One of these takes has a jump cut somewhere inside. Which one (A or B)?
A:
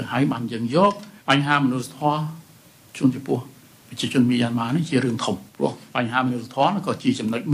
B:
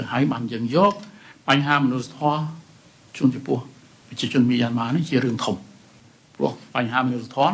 A